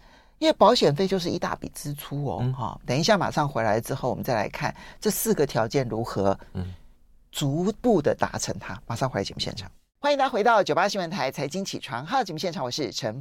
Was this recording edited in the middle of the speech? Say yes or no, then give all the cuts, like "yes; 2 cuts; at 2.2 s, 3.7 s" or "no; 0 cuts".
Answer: yes; 1 cut; at 2.8 s